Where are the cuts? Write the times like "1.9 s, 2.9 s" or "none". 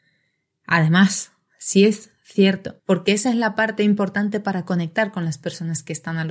2.8 s